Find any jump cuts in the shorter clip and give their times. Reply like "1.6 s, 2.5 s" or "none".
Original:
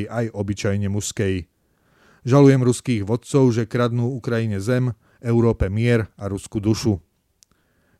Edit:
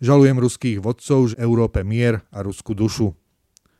1.3 s